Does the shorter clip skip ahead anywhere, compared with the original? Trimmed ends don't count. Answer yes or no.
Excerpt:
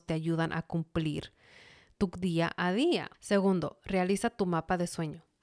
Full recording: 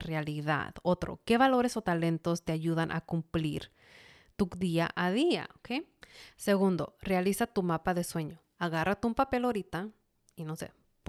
yes